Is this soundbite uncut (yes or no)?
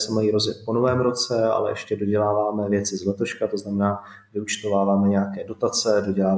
yes